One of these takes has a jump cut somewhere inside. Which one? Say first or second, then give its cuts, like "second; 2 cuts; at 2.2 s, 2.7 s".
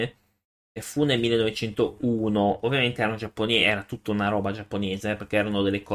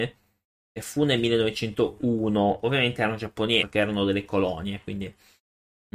second; 1 cut; at 3.6 s